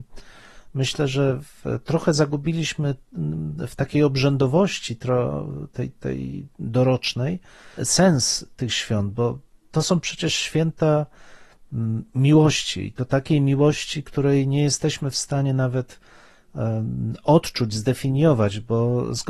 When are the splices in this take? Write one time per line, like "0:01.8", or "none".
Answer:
0:07.8